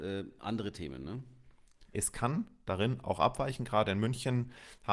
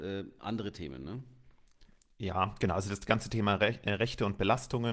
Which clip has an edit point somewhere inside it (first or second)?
first